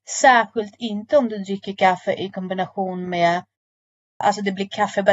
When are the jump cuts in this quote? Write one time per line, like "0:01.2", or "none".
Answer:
0:04.2